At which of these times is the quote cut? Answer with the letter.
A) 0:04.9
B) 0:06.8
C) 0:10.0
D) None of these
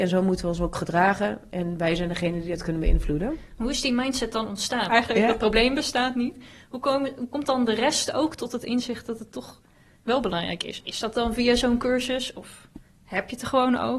A